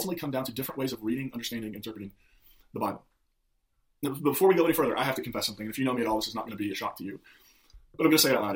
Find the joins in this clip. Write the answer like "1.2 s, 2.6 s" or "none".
none